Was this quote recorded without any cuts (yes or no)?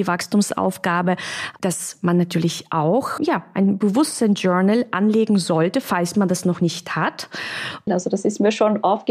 no